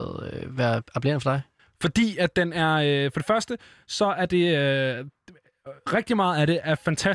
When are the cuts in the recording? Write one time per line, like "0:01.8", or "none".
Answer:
none